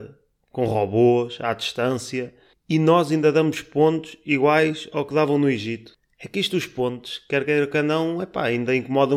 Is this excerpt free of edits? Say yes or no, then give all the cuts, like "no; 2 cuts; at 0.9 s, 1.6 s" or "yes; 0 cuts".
yes; 0 cuts